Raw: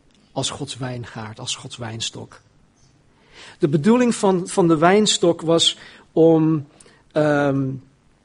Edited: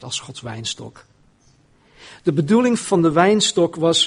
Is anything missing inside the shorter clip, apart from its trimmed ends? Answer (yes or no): yes